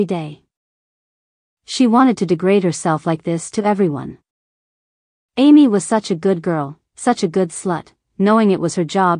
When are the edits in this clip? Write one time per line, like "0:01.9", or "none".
none